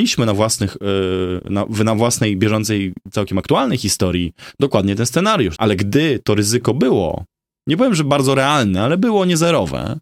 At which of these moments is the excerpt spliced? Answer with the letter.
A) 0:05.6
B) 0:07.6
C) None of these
A